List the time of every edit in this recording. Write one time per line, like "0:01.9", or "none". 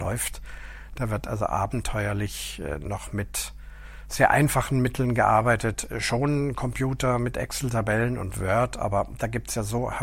none